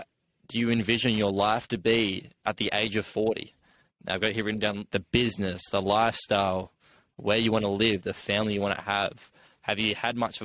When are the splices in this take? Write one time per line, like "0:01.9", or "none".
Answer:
0:04.9